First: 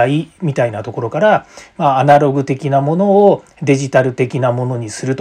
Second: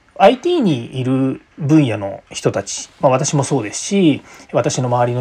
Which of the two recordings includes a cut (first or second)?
second